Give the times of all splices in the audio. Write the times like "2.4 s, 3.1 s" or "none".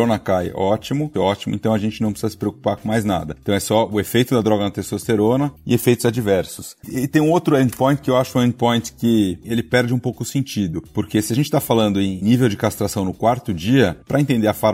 1.1 s, 9.4 s